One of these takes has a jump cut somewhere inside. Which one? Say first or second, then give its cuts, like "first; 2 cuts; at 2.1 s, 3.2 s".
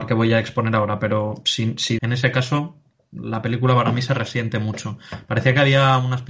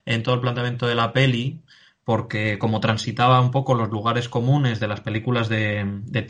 first; 1 cut; at 2.0 s